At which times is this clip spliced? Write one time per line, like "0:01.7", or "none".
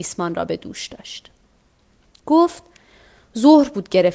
none

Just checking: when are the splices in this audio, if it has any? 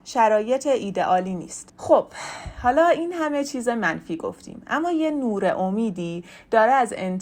none

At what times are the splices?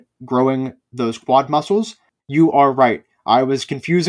0:02.2

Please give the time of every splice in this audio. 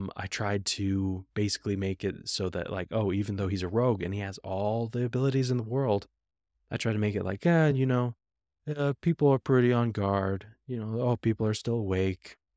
none

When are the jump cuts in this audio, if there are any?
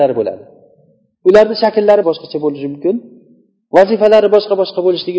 0:02.0

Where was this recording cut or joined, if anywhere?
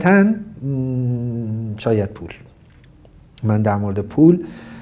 none

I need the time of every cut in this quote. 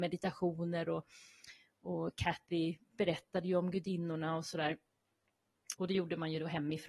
0:05.7

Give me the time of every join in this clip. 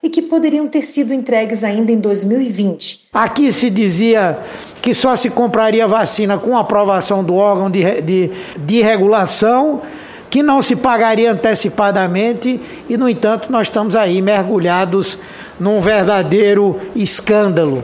0:03.1

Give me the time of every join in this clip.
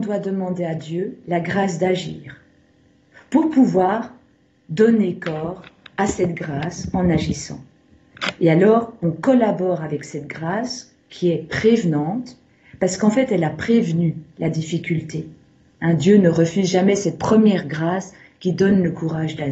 none

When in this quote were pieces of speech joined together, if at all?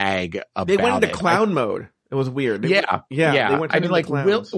none

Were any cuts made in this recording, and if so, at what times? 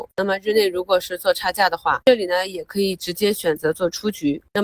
0:02.0

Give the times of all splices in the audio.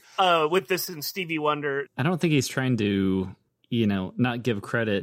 0:01.9

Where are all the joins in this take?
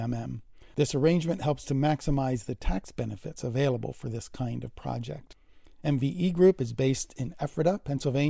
0:05.8

